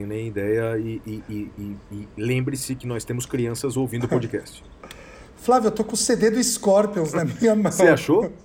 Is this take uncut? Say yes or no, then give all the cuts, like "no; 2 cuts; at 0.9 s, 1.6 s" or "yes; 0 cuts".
yes; 0 cuts